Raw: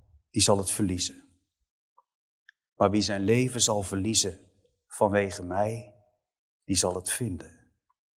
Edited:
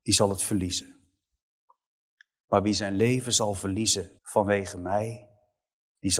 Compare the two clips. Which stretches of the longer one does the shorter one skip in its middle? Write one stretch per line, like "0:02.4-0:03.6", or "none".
0:04.5-0:04.8